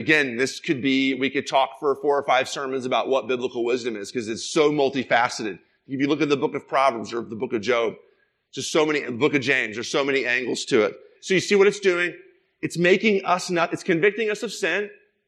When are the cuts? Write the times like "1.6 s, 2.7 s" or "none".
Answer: 11.2 s